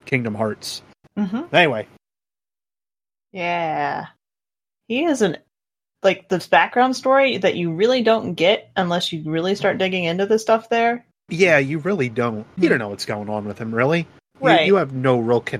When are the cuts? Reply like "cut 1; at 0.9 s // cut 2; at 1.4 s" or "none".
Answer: cut 1; at 1.0 s // cut 2; at 11.3 s // cut 3; at 12.6 s